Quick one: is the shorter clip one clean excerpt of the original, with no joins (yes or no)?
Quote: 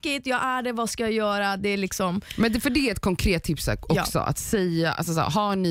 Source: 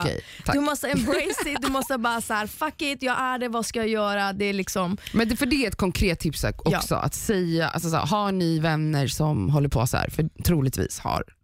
yes